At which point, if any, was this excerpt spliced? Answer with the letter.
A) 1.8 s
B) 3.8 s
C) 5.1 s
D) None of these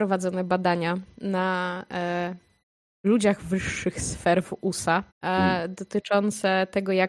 C